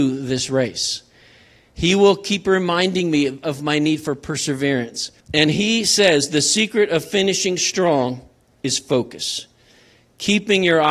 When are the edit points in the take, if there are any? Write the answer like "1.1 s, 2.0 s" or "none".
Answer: 5.2 s